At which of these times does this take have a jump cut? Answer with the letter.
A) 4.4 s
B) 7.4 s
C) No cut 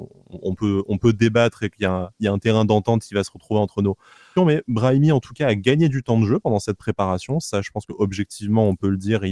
A